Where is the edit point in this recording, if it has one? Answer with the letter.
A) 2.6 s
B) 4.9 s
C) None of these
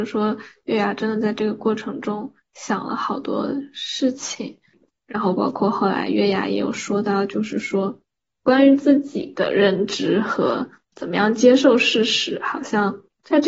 B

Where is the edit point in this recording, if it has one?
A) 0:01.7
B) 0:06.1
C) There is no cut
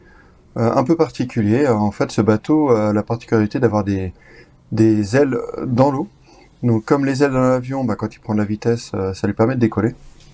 C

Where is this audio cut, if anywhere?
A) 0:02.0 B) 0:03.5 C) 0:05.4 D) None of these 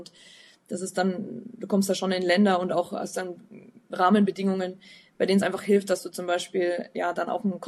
D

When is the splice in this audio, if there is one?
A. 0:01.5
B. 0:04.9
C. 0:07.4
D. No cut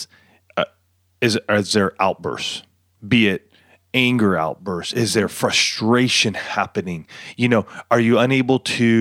D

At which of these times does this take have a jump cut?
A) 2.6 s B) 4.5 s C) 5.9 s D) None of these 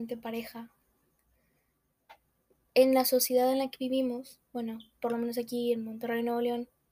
A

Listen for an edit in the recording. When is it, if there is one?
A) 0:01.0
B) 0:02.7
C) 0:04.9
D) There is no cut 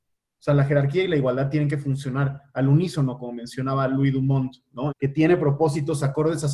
C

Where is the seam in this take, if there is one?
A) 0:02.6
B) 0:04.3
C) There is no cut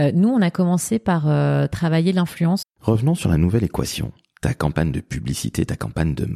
A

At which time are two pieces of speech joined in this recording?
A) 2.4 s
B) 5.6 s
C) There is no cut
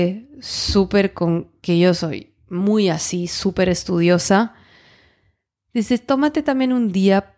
C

